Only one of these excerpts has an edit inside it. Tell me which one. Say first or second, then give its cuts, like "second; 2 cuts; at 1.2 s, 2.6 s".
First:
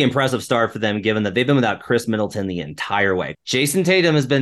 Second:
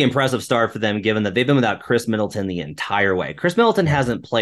first; 1 cut; at 3.3 s